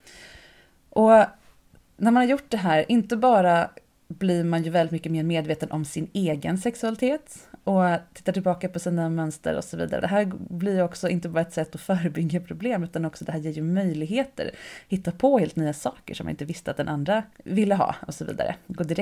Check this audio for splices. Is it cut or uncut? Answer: cut